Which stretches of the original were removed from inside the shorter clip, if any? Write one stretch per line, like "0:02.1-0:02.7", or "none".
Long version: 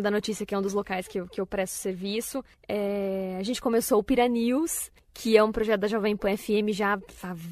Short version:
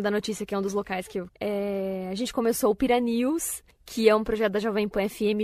0:01.3-0:02.6